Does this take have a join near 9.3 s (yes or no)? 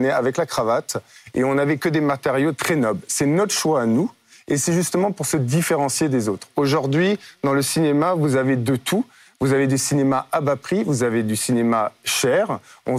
no